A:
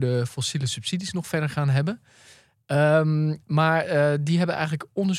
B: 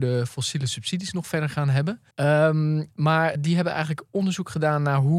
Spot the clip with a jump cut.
B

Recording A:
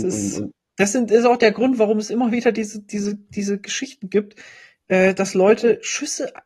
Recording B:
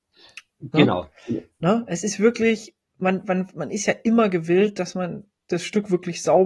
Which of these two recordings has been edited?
B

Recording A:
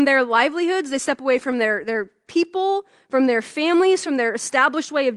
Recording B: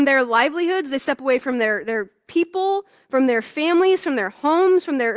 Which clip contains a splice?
A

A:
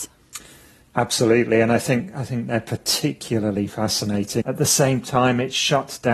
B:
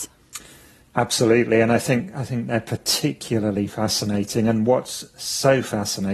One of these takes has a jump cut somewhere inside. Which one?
A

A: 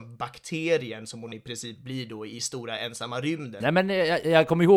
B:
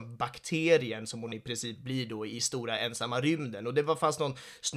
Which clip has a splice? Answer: A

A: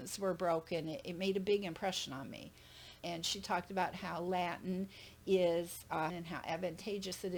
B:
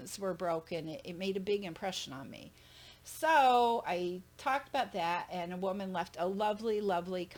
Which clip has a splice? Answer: A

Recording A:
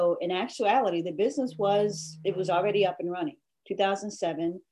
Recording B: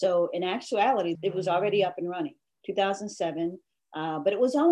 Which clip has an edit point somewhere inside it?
B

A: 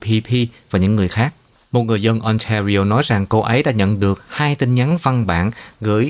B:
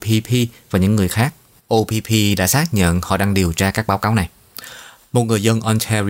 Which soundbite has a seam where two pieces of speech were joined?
A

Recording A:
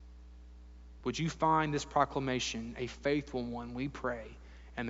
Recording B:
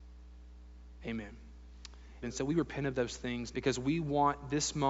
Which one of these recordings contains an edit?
B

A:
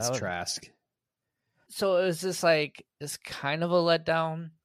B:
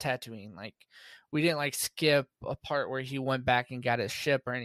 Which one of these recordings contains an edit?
A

